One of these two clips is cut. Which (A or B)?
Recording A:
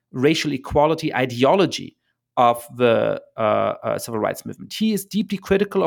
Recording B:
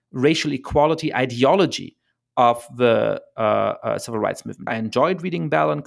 B